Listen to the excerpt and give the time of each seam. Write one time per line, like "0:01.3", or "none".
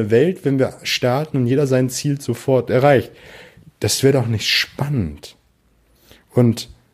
none